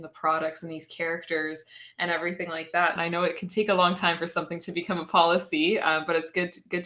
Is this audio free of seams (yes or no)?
no